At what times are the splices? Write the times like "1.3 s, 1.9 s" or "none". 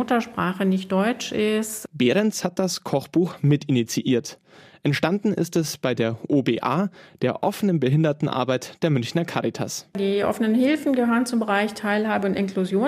none

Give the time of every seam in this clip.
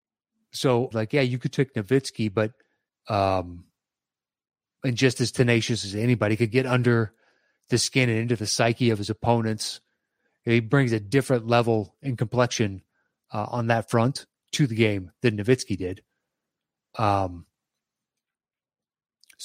0.9 s, 2.9 s

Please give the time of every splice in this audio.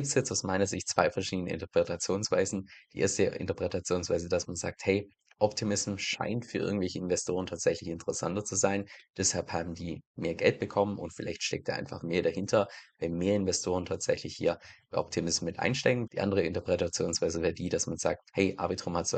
16.1 s

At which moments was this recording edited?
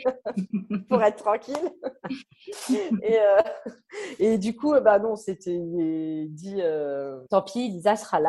7.3 s

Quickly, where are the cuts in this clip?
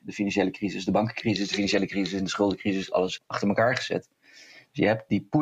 3.2 s

